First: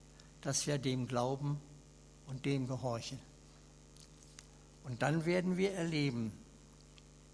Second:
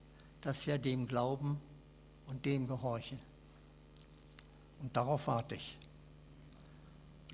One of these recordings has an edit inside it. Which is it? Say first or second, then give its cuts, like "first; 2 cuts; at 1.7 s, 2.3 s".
second; 1 cut; at 4.8 s